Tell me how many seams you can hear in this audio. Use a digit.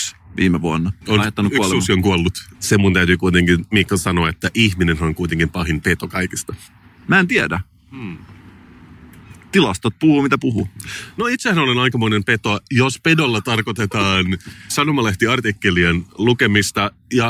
2